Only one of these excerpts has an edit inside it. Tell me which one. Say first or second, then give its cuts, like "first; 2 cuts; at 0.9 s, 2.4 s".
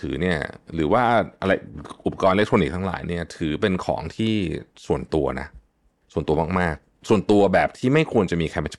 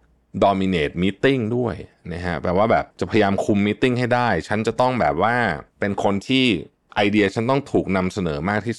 second; 2 cuts; at 2.9 s, 5.7 s